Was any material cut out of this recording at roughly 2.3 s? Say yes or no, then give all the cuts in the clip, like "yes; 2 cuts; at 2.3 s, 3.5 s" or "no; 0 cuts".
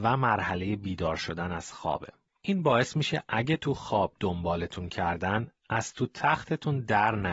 yes; 1 cut; at 2.3 s